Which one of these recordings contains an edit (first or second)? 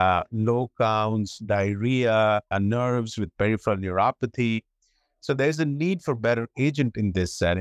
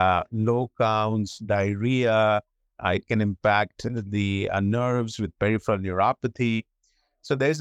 first